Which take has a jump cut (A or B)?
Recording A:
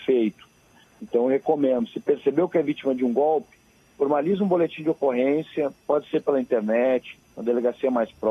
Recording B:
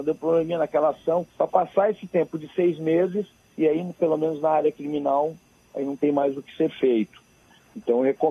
B